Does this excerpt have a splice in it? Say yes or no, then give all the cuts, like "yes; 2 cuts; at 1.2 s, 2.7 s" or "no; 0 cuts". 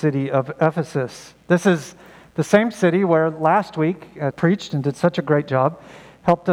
yes; 1 cut; at 4.3 s